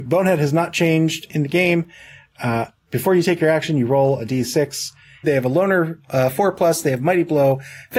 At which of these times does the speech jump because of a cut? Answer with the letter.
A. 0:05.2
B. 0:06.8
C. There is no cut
A